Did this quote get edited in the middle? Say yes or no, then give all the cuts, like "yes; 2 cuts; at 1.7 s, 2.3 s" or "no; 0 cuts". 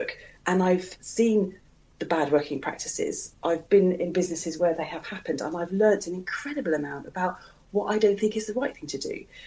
no; 0 cuts